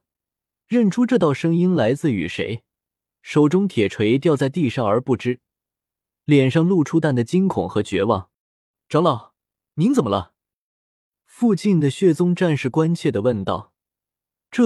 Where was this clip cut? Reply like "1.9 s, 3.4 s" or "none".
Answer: 7.0 s, 8.4 s

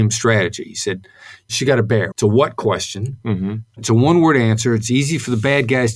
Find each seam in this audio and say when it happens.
2.1 s

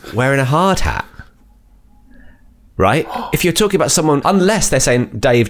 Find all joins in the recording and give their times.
4.2 s

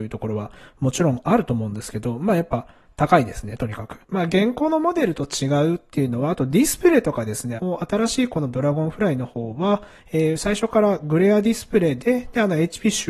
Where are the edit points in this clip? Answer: 4.0 s, 7.6 s

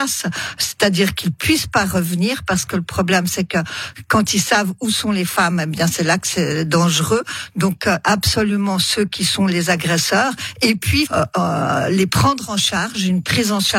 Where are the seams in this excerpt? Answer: 8.0 s, 11.0 s

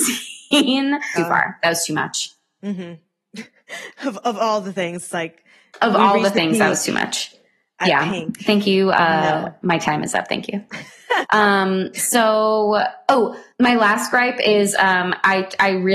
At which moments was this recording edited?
1.2 s, 11.2 s, 13.5 s

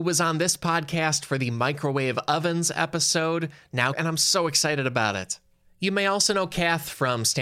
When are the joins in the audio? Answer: 3.9 s

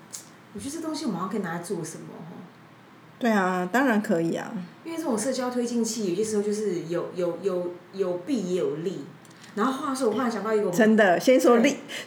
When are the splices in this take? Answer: none

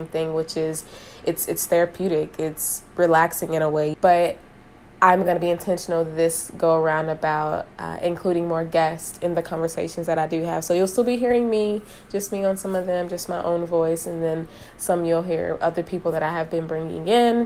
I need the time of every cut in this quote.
3.9 s

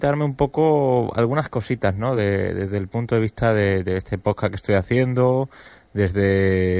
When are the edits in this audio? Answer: none

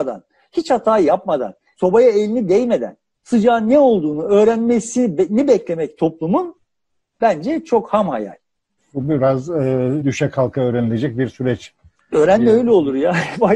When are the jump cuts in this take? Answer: 10.0 s

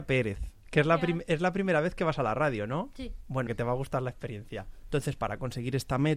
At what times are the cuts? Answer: 3.5 s, 4.8 s

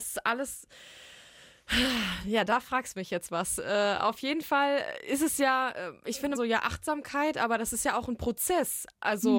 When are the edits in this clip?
6.3 s

